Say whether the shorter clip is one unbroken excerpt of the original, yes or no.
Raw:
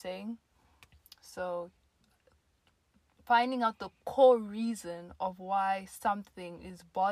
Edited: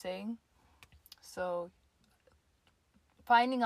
yes